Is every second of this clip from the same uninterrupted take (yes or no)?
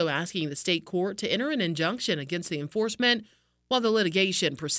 yes